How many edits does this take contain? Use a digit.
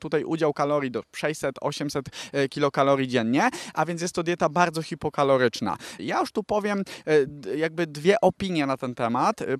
1